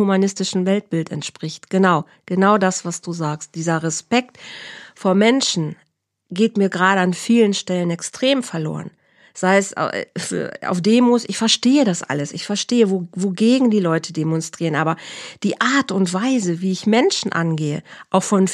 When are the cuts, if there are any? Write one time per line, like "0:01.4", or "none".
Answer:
none